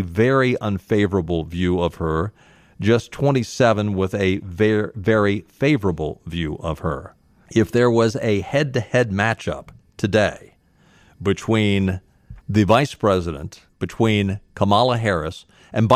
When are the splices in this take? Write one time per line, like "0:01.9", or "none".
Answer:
0:07.5
0:12.4
0:13.7

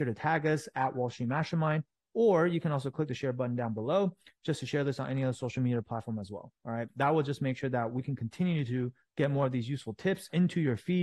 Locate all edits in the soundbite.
0:06.9

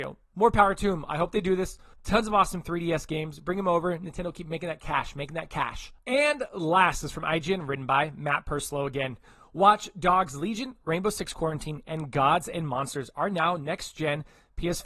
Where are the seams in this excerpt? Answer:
0:01.9

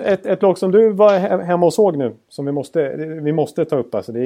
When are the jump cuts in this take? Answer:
none

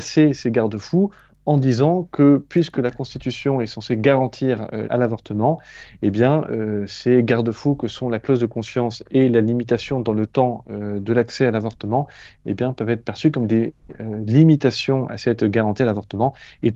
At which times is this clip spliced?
0:04.8

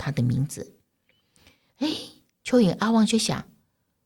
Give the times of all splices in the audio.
none

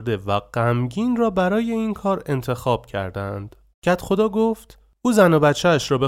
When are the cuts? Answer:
0:03.7

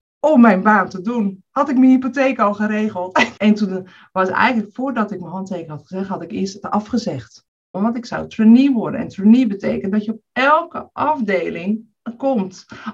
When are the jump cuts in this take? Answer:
0:03.4
0:07.7

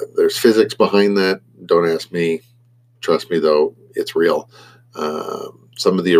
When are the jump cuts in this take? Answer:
none

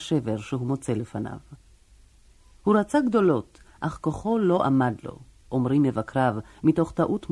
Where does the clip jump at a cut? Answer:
none

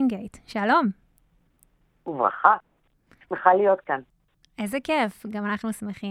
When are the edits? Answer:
none

